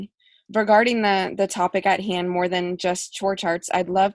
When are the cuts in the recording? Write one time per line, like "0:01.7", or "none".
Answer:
none